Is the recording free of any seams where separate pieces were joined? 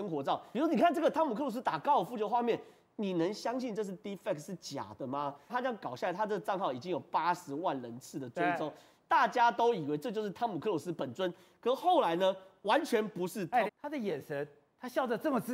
no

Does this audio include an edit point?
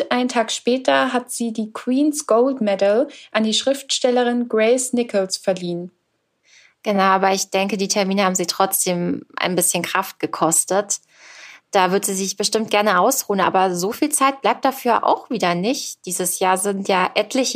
no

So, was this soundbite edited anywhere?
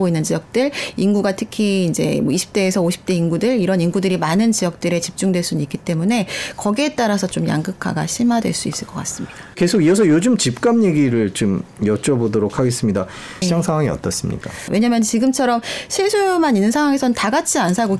yes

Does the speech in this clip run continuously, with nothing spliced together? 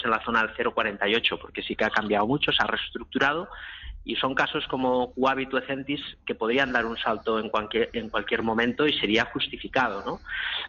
yes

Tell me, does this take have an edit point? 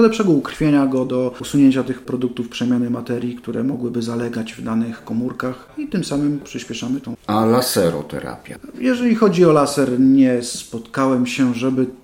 no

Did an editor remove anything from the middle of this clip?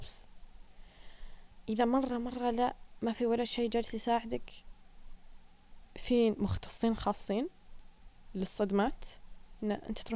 no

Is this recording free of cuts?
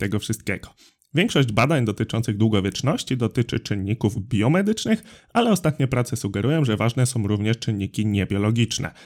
yes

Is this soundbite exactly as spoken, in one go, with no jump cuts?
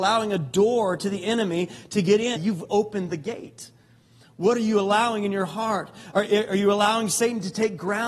no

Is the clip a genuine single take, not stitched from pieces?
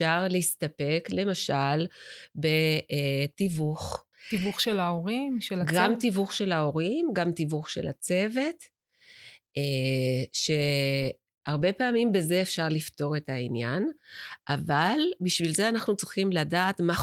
no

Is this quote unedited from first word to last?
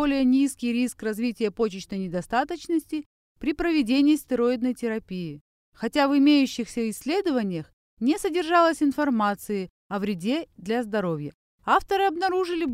no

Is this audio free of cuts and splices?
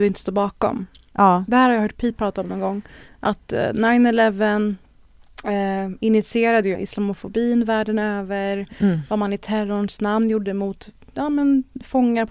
no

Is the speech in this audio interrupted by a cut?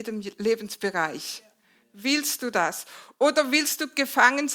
no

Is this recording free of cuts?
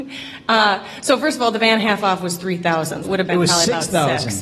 no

